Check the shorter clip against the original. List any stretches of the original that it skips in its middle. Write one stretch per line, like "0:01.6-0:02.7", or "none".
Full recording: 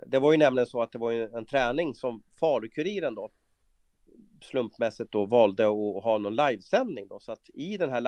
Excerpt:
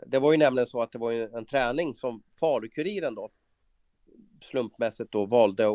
none